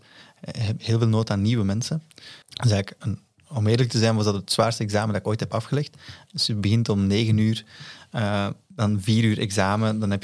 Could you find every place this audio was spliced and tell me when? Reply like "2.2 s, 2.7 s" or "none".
2.4 s, 6.3 s